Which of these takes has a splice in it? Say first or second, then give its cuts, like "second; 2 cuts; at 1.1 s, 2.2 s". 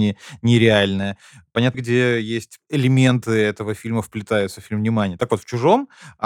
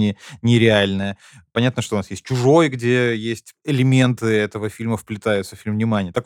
first; 1 cut; at 1.7 s